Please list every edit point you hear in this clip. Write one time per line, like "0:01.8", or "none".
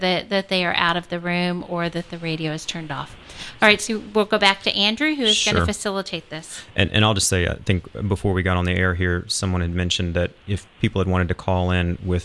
none

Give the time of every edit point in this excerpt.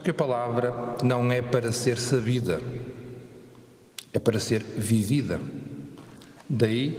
none

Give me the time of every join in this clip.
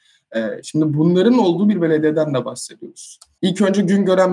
0:03.3

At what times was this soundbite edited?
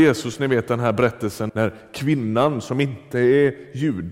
0:01.5

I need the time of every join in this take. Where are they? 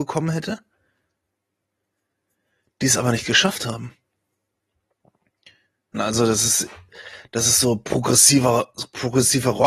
0:05.9

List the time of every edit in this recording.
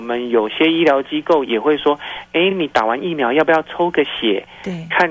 none

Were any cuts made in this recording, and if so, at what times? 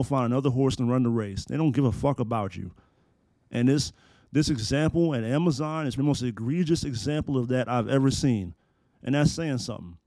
0:06.0

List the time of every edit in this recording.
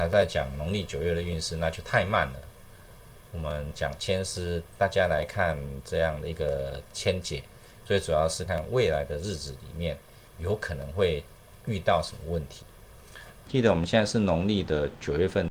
0:08.5
0:13.5

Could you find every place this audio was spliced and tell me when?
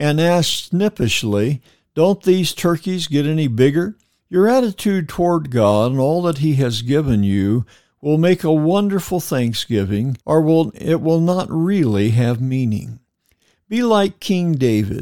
0:04.2
0:10.2

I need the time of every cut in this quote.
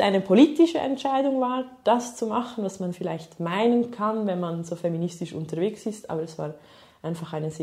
none

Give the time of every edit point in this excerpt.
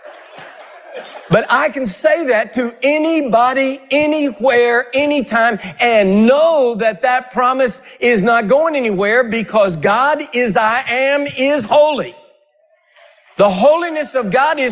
none

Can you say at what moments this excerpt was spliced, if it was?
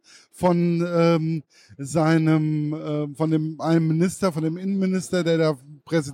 none

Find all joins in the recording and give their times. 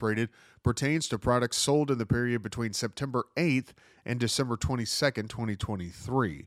none

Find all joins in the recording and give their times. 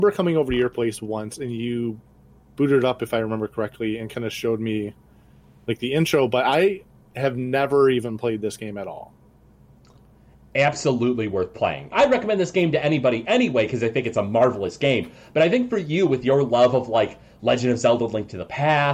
0:11.9

